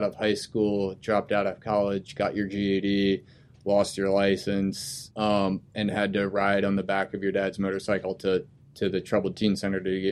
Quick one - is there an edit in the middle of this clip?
yes; 1 cut; at 5.1 s

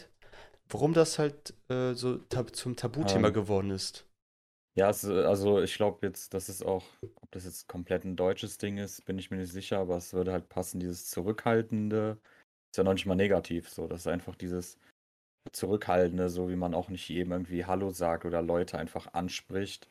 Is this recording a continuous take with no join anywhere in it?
yes; 0 cuts

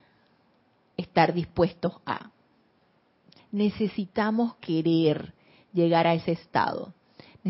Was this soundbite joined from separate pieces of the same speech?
yes; 1 cut; at 3.4 s

